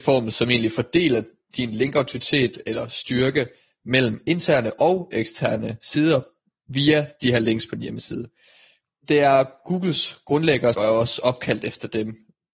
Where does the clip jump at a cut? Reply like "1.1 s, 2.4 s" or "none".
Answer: 10.7 s